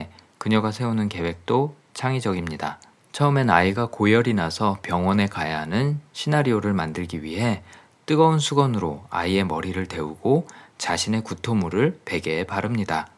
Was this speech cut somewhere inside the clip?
no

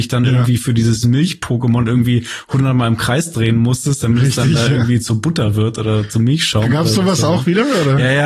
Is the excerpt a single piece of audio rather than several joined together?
yes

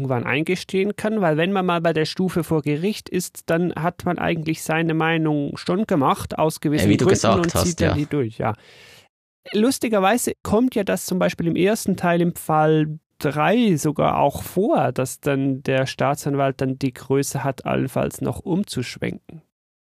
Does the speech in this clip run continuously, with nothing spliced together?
yes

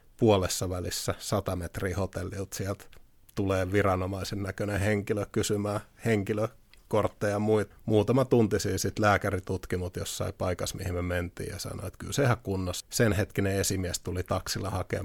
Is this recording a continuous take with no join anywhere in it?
no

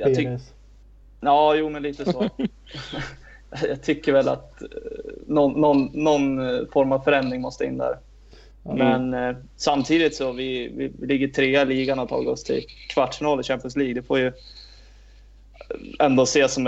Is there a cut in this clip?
no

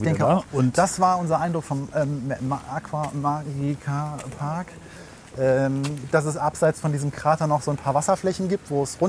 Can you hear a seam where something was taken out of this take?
yes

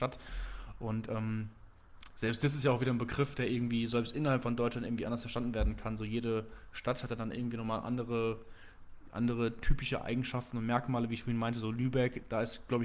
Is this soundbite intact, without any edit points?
yes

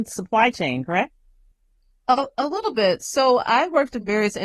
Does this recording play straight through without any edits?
yes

